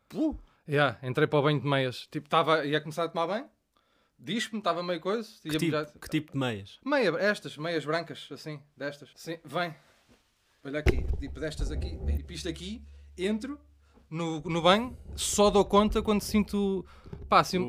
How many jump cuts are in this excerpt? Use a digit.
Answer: 2